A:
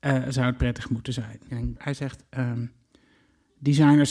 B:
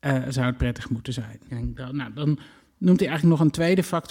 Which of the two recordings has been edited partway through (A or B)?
A